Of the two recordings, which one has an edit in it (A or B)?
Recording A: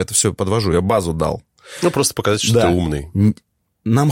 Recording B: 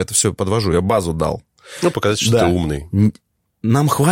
B